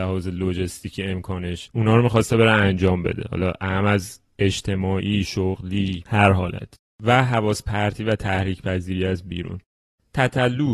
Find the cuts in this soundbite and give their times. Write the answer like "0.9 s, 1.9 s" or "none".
none